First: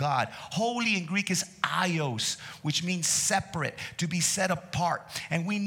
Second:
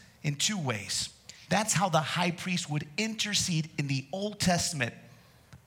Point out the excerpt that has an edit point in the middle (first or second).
second